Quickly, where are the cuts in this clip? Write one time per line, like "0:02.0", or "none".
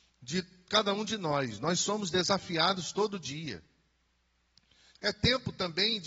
0:04.9